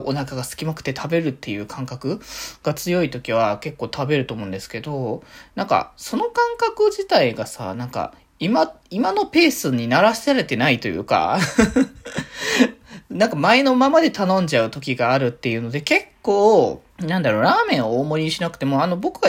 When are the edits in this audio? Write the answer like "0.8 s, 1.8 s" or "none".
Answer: 16.9 s